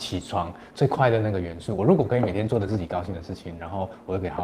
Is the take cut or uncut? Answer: uncut